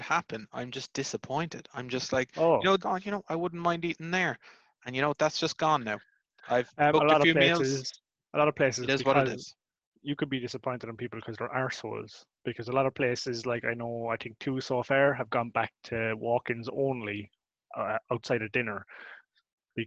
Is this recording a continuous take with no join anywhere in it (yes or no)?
no